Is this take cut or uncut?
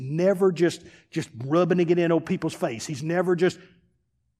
uncut